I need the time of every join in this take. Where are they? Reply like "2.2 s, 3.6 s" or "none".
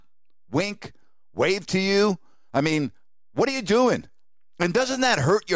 none